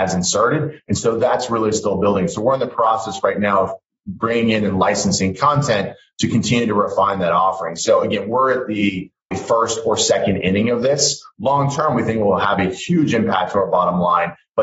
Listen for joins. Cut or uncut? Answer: cut